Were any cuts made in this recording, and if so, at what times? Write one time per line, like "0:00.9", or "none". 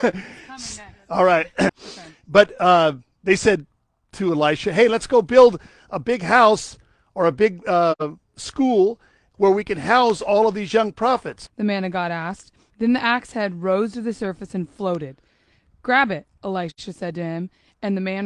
0:01.7
0:11.5
0:12.7

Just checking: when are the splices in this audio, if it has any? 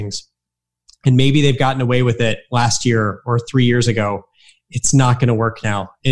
none

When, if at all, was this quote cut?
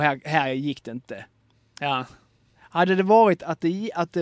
none

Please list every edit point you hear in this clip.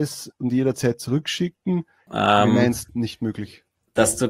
0:02.1

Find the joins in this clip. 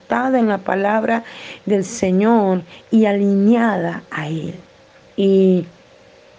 0:05.0

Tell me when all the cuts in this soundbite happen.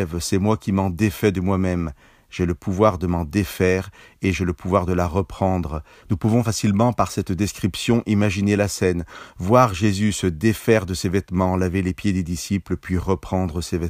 0:06.0

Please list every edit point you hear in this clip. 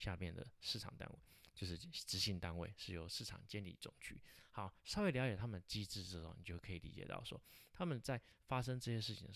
none

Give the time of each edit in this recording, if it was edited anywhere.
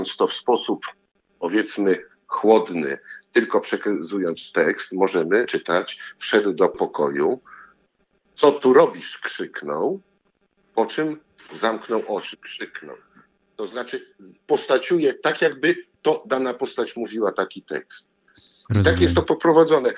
0:12.3
0:14.4

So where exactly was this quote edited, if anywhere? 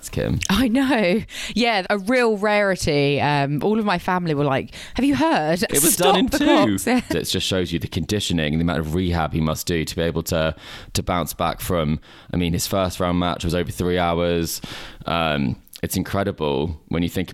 0:01.8
0:05.7
0:07.1

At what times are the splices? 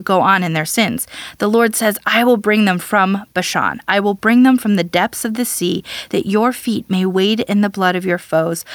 none

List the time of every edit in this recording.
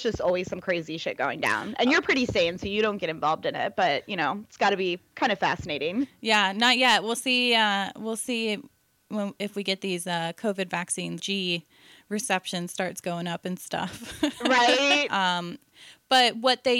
0:11.2
0:15.1

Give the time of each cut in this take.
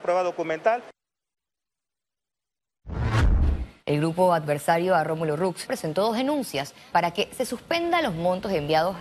0:03.8
0:05.7
0:06.9

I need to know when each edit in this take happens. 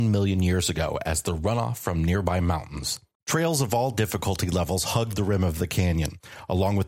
0:03.1

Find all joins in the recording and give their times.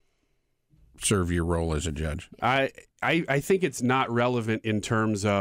none

